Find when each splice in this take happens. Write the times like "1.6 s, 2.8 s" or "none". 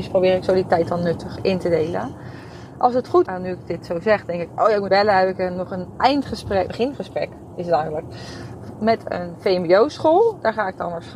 3.3 s, 4.9 s, 6.7 s